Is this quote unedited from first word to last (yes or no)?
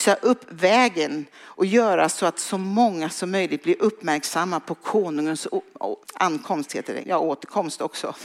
no